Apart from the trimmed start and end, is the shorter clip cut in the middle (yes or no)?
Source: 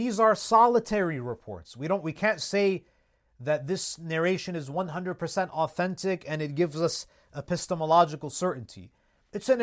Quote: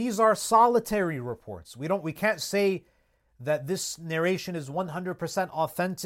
no